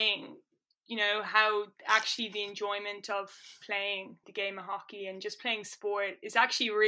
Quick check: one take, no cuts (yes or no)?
no